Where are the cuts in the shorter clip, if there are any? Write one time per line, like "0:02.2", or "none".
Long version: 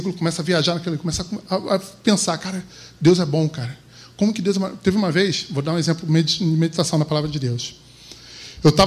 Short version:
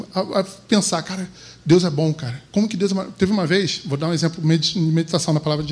0:02.5